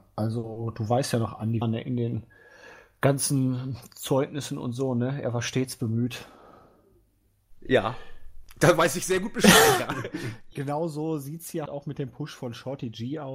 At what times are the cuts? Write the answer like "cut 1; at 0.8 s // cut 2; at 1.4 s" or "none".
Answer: cut 1; at 1.6 s // cut 2; at 11.7 s